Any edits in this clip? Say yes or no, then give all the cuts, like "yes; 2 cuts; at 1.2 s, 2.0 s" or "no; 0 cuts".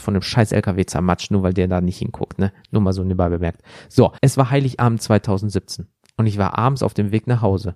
yes; 1 cut; at 4.2 s